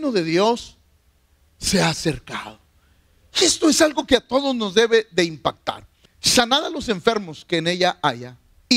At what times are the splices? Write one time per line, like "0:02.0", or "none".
0:06.1